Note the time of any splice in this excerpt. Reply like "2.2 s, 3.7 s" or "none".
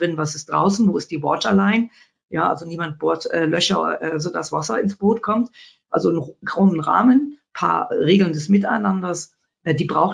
none